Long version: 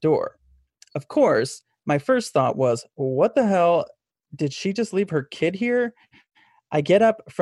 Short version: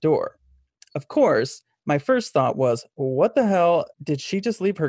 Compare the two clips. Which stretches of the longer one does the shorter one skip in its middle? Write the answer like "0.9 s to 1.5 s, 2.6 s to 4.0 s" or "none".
3.9 s to 4.2 s

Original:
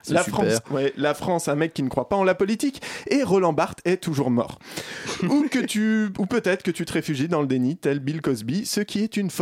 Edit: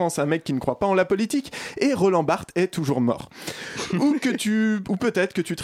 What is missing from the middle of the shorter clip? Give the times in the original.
none

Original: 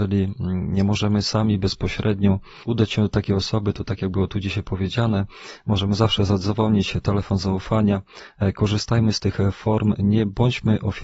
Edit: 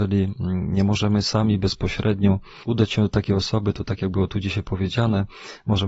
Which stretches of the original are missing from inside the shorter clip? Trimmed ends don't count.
none

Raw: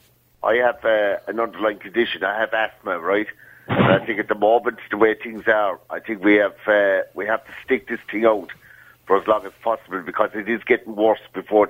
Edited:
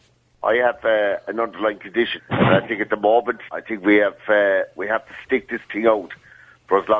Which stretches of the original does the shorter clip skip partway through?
2.2 s to 3.6 s, 4.9 s to 5.9 s

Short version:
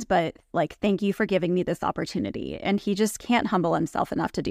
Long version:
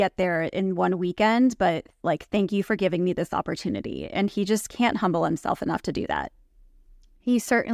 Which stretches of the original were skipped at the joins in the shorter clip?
none

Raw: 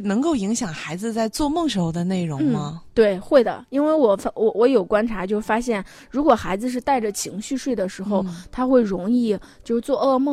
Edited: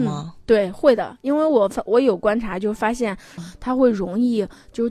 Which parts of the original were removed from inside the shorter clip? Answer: 4.3 s to 4.5 s, 6.0 s to 8.3 s

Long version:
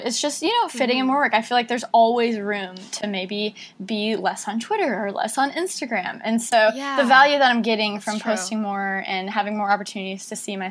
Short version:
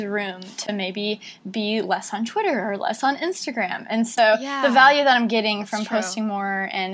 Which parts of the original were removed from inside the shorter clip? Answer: none

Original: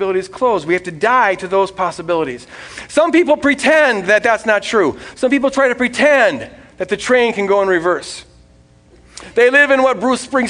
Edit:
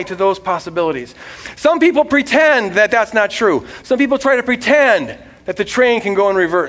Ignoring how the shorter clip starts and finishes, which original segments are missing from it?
none

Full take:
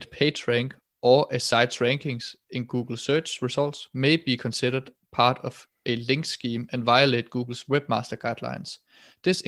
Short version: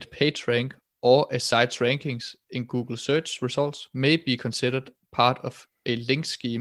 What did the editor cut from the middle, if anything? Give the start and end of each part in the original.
none

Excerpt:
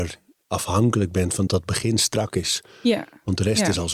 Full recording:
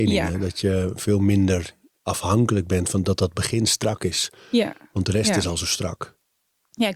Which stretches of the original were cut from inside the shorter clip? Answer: 3.0 s to 3.2 s

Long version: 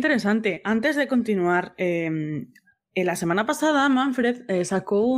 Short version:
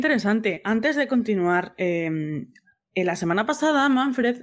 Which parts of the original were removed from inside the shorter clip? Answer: none

